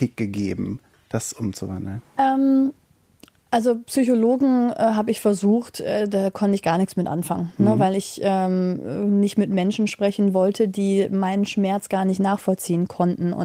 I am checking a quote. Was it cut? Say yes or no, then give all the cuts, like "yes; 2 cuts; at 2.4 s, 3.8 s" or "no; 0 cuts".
no; 0 cuts